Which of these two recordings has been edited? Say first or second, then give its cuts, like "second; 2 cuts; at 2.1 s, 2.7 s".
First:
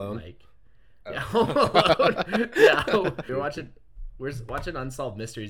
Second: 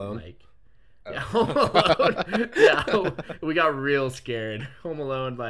first; 1 cut; at 3.3 s